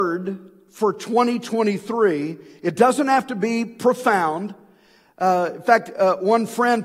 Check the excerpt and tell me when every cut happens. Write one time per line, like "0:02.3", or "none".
none